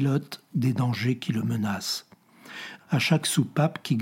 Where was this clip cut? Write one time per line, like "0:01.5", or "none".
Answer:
0:02.8